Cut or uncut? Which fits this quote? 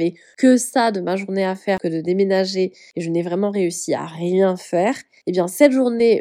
uncut